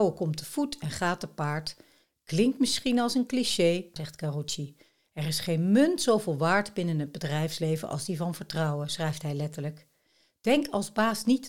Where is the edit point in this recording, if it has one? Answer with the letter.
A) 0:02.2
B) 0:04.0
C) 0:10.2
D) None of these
B